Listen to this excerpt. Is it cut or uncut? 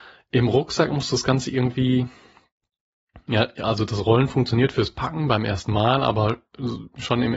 uncut